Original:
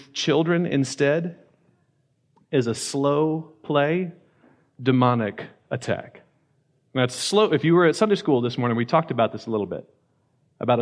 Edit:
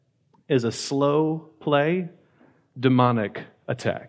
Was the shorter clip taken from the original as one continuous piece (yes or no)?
yes